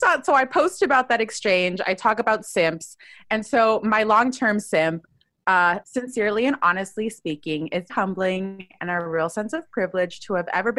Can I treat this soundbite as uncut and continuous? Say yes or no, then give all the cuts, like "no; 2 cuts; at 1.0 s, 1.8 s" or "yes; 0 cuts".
no; 2 cuts; at 5.8 s, 7.9 s